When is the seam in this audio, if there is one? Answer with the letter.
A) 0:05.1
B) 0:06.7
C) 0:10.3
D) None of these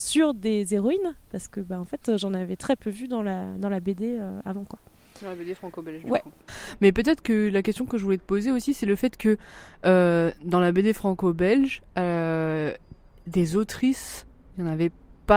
D